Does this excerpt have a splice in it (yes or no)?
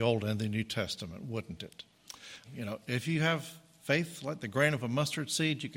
yes